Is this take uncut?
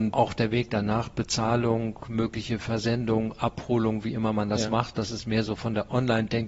yes; 0 cuts

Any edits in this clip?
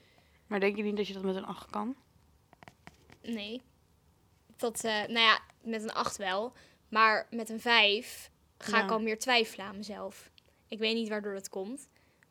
no; 0 cuts

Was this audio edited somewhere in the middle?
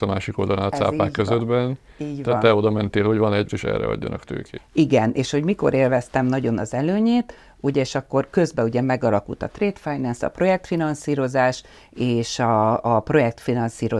yes; 2 cuts; at 3.5 s, 4.6 s

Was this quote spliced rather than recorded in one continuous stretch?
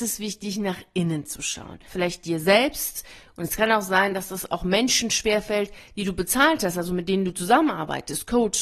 yes; 1 cut; at 1.9 s

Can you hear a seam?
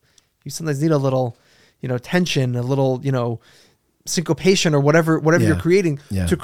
no; 0 cuts

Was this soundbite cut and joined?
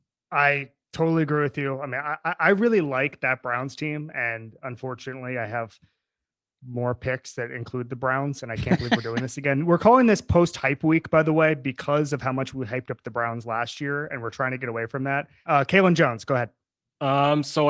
yes; 1 cut; at 15.4 s

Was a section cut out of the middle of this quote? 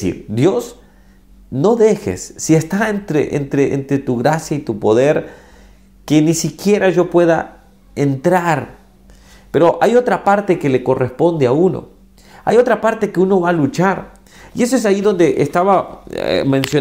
no; 0 cuts

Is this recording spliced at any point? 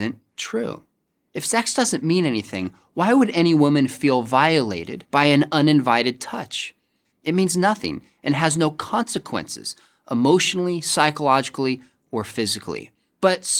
yes; 1 cut; at 7.1 s

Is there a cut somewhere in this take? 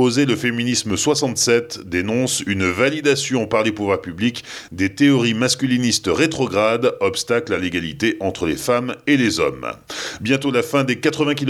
no; 0 cuts

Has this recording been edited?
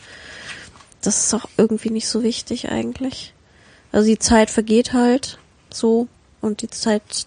no; 0 cuts

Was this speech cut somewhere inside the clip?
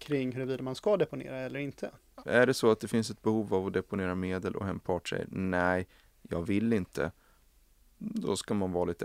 yes; 1 cut; at 2.2 s

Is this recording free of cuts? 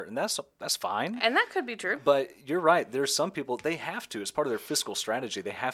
yes; 0 cuts

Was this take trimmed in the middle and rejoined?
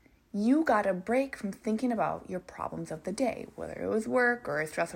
no; 0 cuts

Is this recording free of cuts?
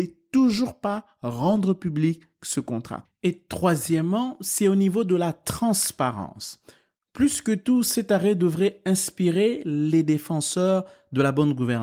yes; 0 cuts

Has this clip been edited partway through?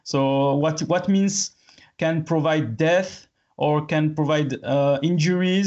no; 0 cuts

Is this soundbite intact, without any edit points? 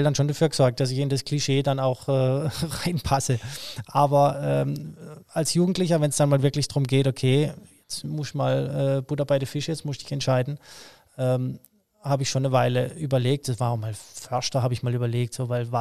yes; 0 cuts

